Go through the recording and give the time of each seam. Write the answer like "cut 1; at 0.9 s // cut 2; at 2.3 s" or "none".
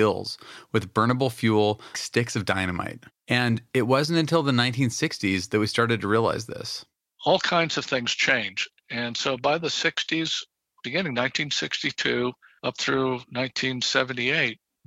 cut 1; at 1.9 s